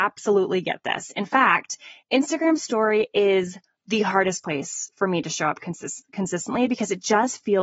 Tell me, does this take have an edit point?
no; 0 cuts

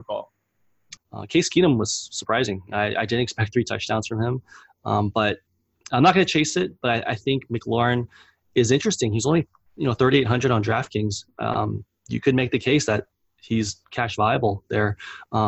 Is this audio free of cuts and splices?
no; 1 cut; at 1.0 s

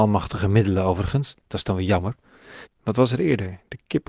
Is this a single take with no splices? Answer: no; 1 cut; at 2.7 s

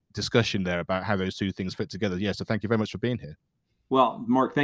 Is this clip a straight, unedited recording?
yes; 0 cuts

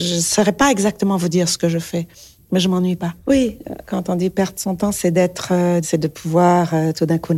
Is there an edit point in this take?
yes; 1 cut; at 5.8 s

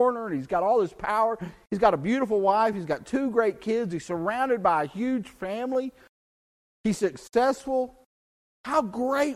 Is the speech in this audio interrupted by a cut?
no; 0 cuts

